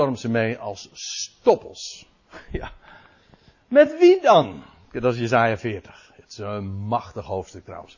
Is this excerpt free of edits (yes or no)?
yes